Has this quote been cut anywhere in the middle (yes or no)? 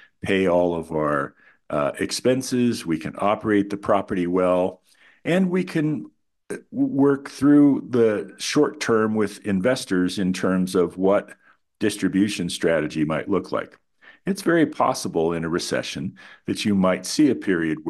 no